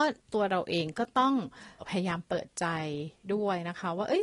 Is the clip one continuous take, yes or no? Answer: no